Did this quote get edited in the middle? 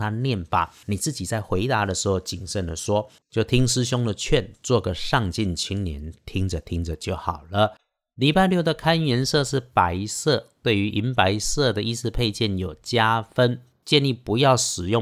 no; 0 cuts

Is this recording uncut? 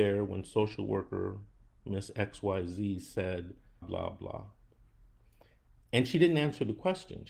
no; 1 cut; at 3.8 s

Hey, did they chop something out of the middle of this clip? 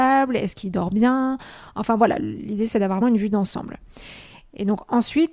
yes; 1 cut; at 3.0 s

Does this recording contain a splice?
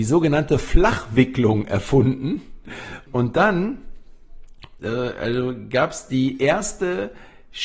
yes; 2 cuts; at 3.1 s, 4.8 s

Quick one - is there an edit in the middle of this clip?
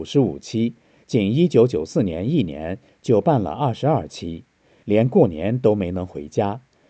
no; 0 cuts

